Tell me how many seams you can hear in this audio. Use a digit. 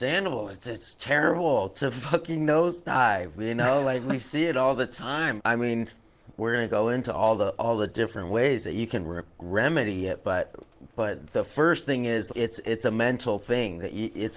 2